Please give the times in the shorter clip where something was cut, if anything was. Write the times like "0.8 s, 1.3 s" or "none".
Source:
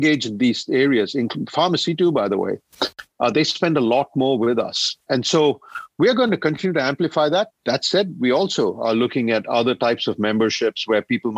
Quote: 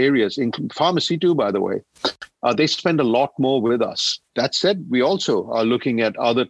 4.3 s